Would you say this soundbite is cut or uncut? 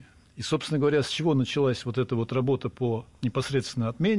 uncut